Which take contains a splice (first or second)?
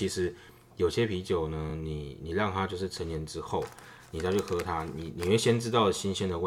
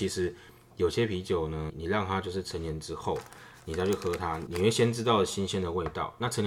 second